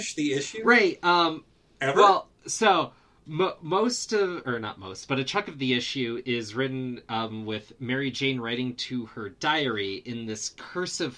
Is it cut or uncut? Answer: uncut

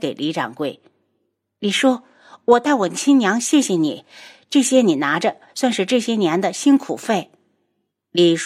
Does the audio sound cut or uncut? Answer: uncut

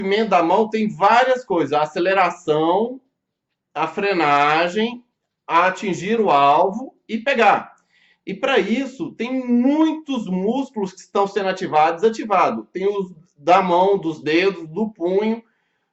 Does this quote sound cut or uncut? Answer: uncut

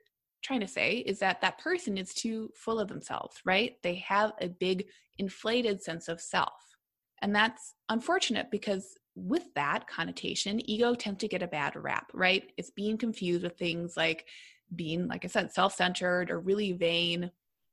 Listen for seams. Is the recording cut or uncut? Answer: uncut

